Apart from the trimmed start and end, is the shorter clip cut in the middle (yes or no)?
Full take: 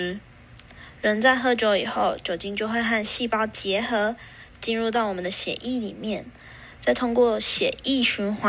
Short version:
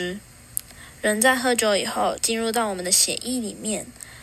yes